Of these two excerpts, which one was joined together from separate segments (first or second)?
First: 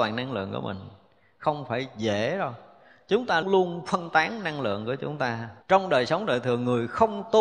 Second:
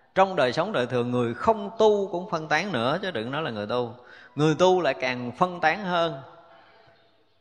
first